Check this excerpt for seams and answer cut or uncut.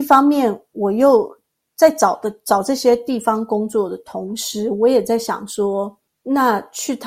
uncut